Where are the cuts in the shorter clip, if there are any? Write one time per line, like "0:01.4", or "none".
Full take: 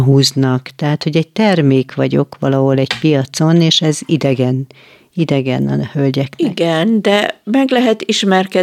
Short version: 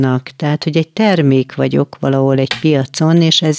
none